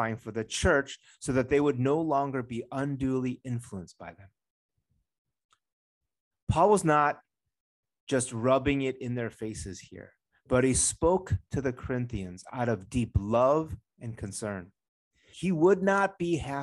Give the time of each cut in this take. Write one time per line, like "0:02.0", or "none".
0:15.3